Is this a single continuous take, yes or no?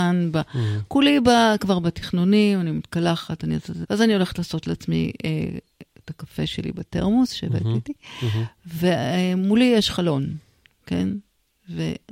no